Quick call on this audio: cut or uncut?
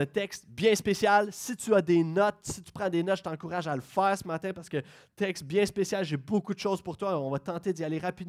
uncut